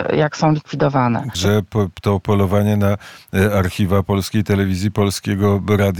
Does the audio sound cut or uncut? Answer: cut